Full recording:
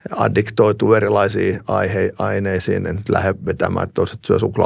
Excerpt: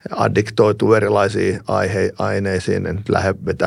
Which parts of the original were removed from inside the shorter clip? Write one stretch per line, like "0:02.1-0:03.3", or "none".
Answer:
none